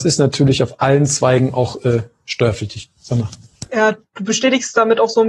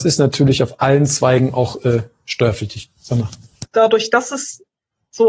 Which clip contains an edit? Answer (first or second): second